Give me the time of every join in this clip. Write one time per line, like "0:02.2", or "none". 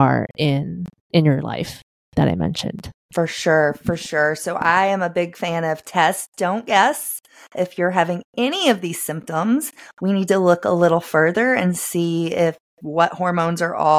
none